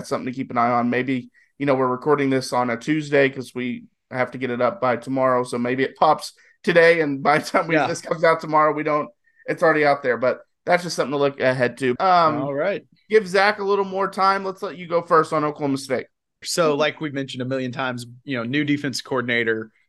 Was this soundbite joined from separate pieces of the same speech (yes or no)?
yes